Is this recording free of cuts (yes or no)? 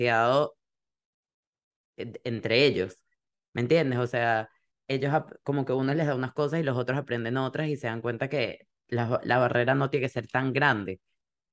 yes